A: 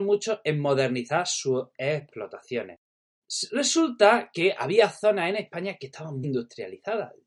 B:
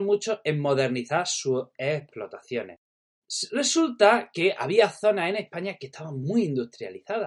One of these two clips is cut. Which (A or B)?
A